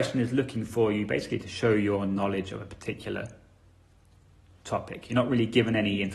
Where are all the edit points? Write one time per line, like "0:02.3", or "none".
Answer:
none